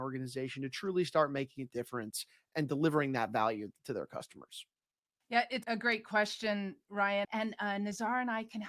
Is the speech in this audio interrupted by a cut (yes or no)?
yes